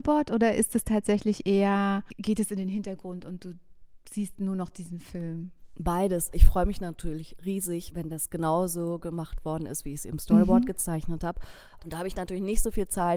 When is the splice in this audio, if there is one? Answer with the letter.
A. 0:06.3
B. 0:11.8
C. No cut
B